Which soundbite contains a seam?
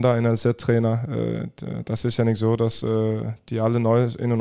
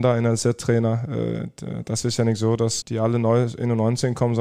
second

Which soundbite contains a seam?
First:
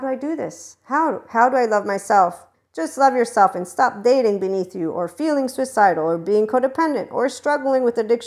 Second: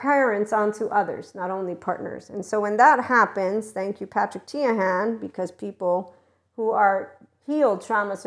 first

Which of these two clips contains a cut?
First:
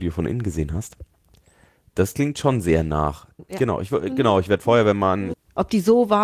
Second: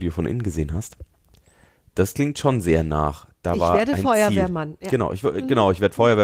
first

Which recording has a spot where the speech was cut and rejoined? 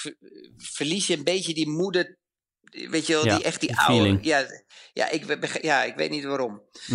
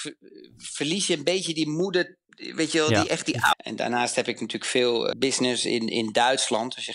second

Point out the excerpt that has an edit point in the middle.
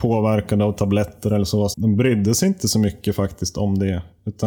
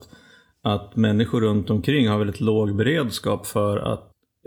first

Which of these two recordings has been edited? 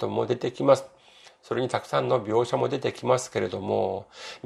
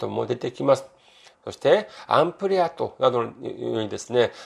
second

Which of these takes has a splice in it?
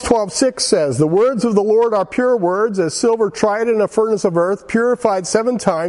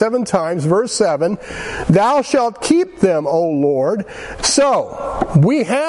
second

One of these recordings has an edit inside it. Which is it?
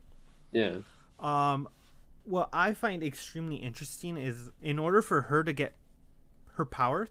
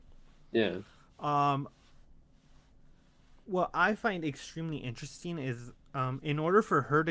first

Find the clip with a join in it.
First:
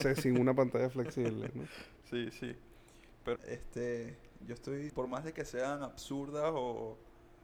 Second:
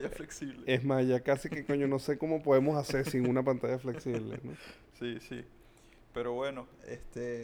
first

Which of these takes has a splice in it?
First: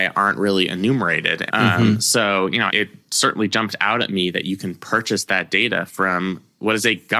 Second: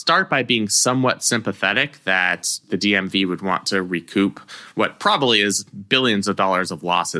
first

